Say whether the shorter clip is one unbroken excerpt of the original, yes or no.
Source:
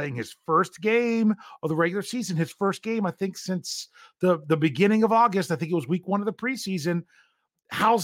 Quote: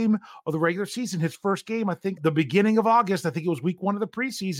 no